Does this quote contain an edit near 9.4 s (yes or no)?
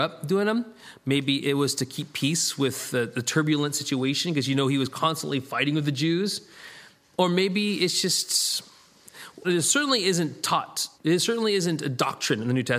yes